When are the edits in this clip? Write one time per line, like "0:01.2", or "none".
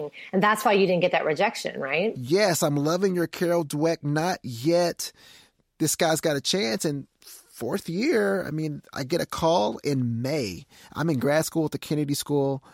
none